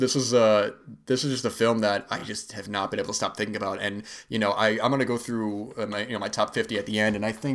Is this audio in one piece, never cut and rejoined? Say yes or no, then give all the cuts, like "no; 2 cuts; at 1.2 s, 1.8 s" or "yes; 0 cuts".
yes; 0 cuts